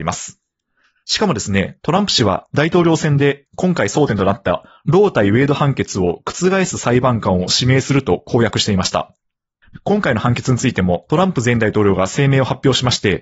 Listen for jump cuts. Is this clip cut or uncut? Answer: cut